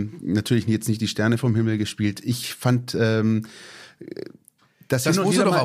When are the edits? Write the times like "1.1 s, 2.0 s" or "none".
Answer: none